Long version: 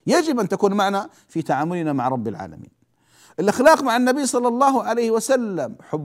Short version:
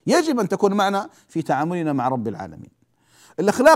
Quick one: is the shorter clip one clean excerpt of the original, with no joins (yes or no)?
yes